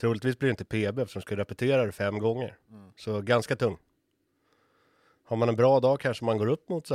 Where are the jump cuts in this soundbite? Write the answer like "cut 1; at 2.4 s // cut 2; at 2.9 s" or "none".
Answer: none